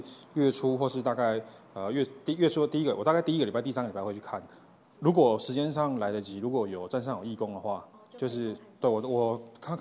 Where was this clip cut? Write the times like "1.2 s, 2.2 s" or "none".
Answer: none